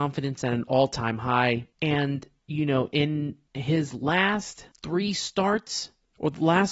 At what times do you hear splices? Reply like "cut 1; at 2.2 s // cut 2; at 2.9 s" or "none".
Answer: cut 1; at 1.7 s // cut 2; at 4.7 s